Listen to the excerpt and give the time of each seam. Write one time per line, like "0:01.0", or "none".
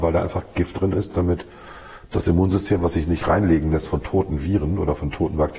none